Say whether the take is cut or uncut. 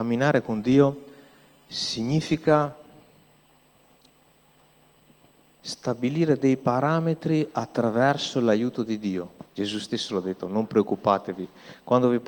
cut